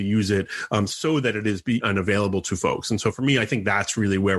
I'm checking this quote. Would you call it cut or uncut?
cut